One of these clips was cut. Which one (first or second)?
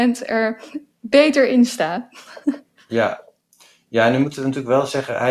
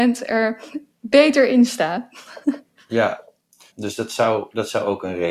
second